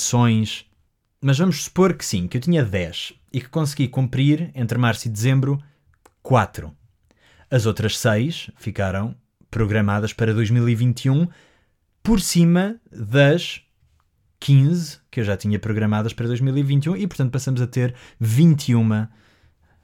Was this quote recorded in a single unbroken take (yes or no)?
yes